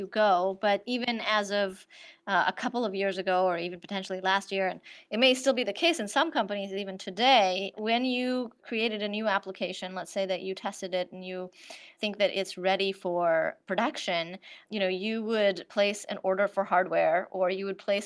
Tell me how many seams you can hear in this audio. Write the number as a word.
zero